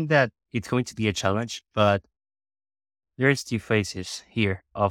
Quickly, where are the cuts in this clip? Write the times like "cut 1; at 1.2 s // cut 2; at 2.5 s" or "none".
none